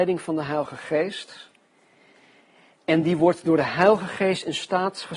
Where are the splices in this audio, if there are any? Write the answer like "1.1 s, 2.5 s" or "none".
none